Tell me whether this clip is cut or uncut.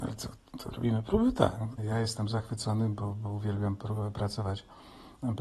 cut